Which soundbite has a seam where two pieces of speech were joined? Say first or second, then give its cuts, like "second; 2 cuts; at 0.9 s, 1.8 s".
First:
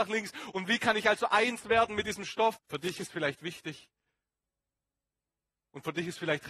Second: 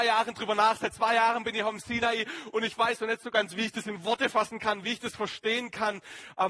first; 1 cut; at 2.6 s